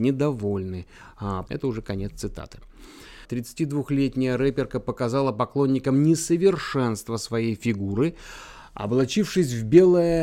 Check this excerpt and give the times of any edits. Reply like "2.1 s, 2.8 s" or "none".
1.5 s, 3.2 s